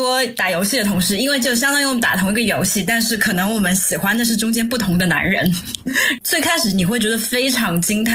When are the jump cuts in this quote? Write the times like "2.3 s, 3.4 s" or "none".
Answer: none